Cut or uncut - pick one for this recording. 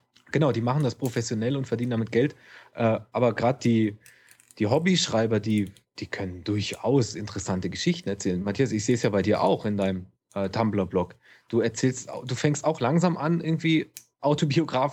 uncut